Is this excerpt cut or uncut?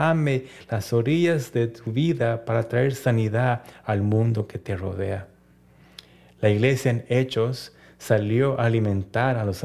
uncut